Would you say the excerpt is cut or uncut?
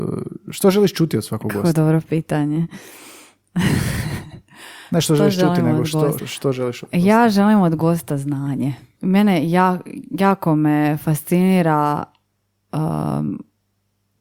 cut